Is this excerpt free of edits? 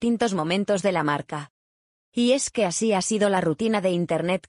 yes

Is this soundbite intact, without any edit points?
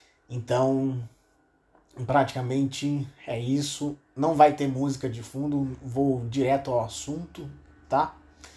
yes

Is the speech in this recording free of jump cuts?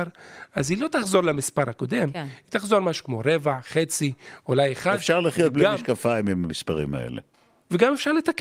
yes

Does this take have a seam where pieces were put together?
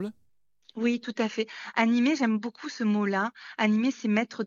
no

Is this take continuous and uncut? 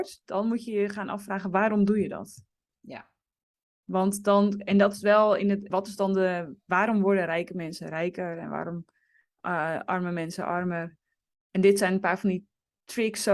no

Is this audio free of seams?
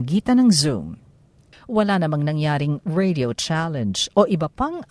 no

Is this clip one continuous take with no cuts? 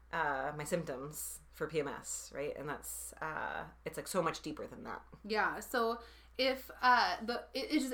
yes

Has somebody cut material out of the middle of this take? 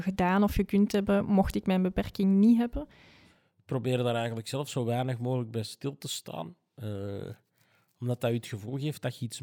no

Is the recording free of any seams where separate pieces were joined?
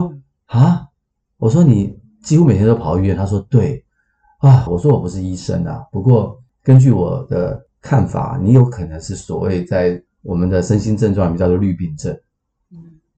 no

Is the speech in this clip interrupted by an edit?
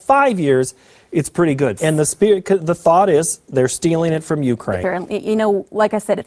yes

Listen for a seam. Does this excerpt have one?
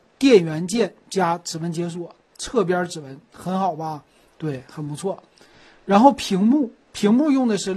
no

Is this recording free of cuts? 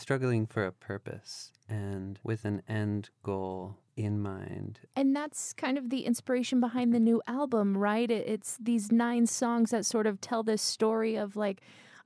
yes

